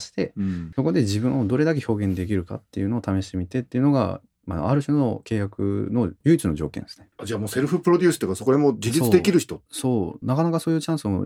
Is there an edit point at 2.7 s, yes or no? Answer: no